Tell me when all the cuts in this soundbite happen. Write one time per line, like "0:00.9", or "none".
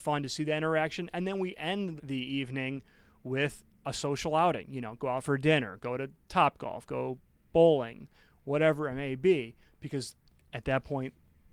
0:02.0